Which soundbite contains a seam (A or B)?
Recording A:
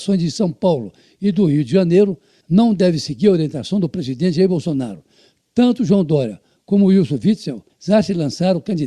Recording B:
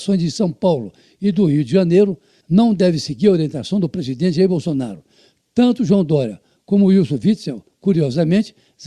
A